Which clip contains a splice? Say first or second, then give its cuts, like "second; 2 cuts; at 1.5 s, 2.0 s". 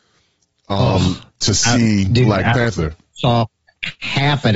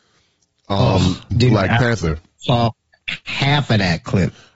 second; 1 cut; at 1.3 s